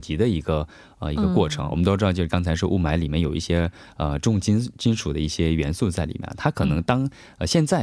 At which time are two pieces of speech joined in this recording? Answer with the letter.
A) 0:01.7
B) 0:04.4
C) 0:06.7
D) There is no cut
D